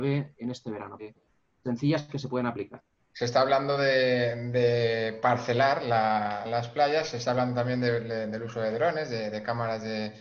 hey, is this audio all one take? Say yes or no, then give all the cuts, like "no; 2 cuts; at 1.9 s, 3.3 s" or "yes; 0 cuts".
no; 2 cuts; at 1.0 s, 6.5 s